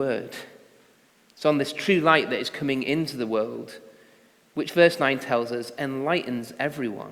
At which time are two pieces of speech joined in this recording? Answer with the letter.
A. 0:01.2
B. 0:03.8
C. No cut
C